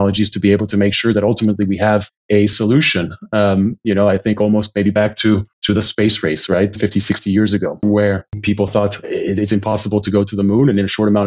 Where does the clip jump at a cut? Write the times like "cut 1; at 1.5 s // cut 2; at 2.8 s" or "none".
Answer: cut 1; at 6.7 s // cut 2; at 9.0 s